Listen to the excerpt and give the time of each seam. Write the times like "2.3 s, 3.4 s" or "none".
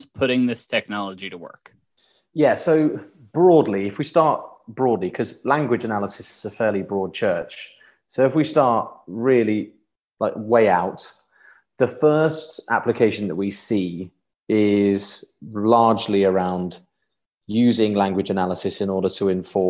none